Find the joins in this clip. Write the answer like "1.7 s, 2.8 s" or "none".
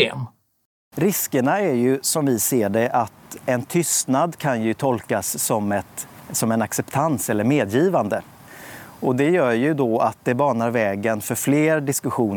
none